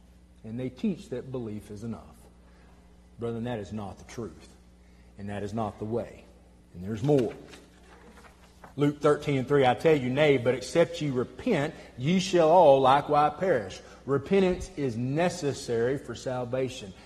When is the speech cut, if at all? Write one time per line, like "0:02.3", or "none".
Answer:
0:06.6
0:08.7

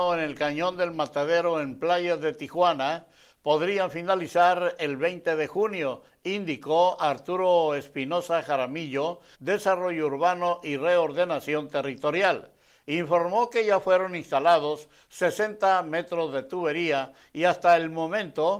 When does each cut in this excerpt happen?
0:09.3

